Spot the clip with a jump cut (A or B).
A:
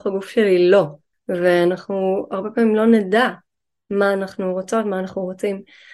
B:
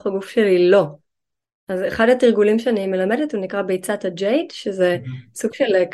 A